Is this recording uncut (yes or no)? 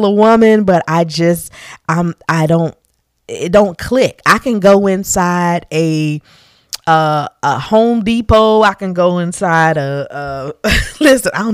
yes